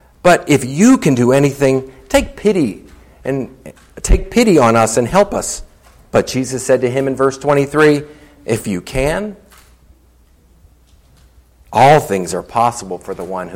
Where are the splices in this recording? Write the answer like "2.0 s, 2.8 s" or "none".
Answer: none